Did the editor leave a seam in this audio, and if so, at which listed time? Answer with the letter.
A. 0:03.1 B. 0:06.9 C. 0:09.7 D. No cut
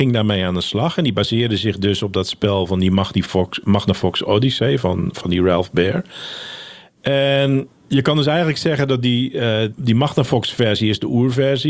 C